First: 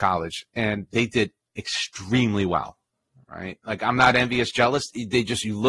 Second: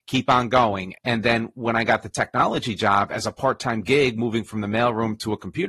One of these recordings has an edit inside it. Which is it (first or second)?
second